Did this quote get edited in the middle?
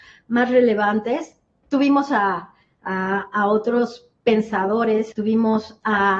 yes; 1 cut; at 5.1 s

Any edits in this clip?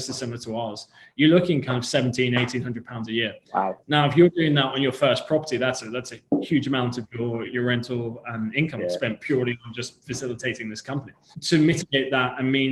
yes; 2 cuts; at 7.5 s, 11.3 s

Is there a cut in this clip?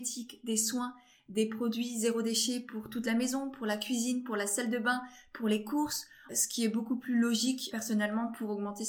yes; 2 cuts; at 6.3 s, 7.7 s

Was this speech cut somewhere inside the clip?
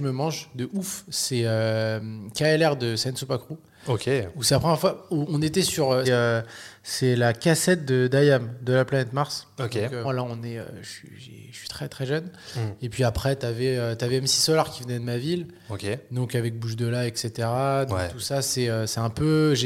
yes; 2 cuts; at 6.0 s, 10.0 s

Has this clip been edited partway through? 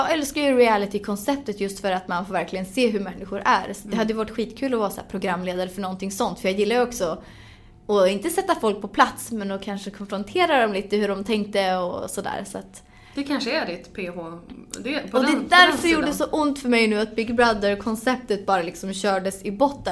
no; 0 cuts

